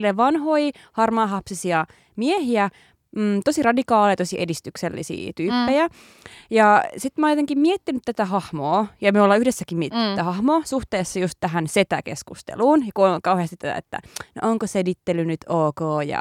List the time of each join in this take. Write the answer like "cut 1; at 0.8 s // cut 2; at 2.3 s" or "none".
none